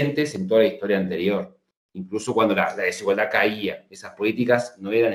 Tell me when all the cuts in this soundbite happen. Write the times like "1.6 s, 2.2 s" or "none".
none